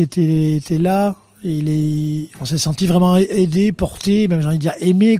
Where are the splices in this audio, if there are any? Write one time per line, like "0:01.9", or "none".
none

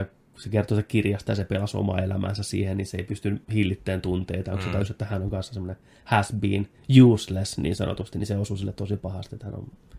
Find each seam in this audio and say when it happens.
none

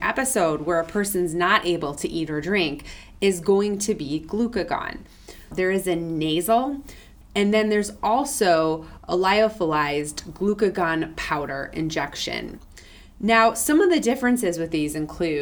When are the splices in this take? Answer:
0:05.5
0:07.2

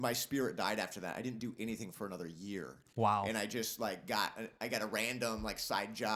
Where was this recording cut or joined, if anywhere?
none

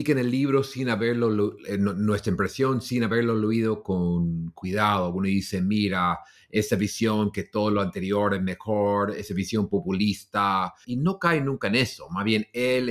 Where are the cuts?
0:10.8

